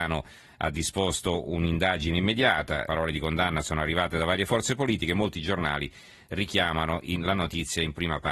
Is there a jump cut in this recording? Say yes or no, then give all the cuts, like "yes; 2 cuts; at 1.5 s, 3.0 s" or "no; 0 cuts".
yes; 1 cut; at 2.9 s